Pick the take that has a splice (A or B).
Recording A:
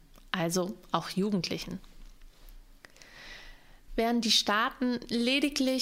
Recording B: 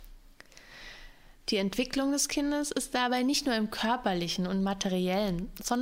B